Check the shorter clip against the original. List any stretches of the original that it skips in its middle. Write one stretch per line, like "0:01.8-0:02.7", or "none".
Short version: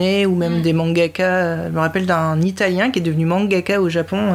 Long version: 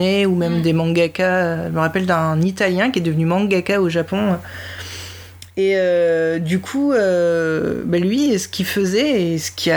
none